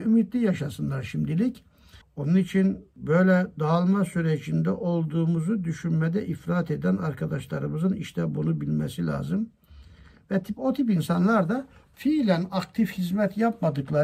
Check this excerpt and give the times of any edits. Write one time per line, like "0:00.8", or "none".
0:02.0